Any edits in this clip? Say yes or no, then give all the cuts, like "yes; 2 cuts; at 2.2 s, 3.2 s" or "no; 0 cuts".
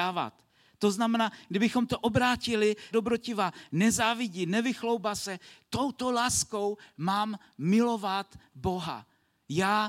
yes; 1 cut; at 2.9 s